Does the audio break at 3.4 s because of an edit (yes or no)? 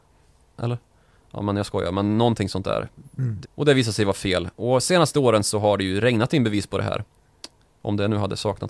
yes